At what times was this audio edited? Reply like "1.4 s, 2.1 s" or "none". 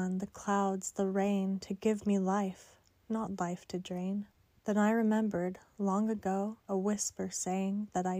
4.6 s, 6.6 s